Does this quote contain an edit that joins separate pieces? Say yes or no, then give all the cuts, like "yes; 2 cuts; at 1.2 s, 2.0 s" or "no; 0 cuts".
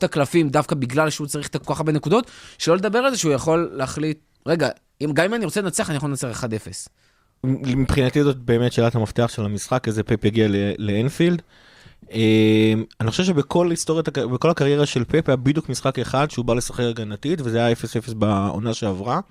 yes; 1 cut; at 7.4 s